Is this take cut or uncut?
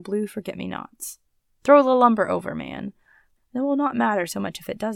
cut